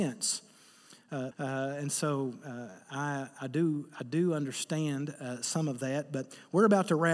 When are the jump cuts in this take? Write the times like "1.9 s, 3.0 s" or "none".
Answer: 1.3 s

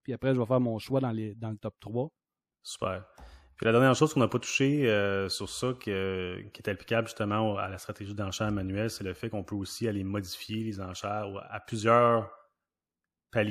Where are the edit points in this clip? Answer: 2.5 s

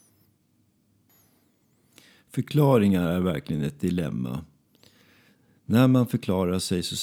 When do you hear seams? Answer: none

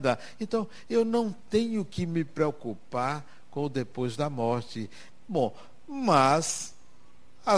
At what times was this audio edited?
5.2 s

